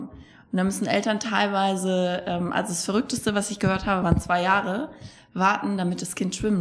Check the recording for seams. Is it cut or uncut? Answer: uncut